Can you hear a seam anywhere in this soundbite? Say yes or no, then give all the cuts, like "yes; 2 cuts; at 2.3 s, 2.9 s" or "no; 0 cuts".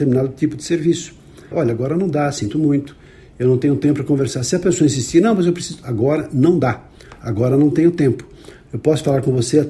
yes; 1 cut; at 1.5 s